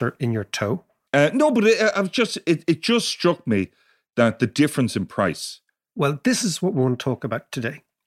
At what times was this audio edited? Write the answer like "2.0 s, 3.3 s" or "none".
1.1 s